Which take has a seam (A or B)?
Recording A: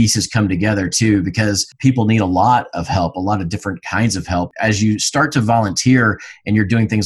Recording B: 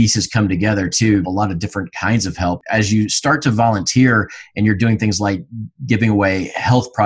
B